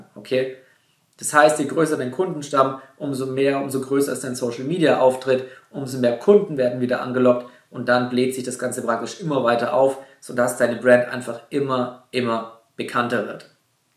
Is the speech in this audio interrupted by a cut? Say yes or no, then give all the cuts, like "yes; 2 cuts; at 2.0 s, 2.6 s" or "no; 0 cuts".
no; 0 cuts